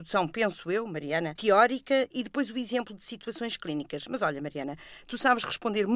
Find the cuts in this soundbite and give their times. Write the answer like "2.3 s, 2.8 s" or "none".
1.4 s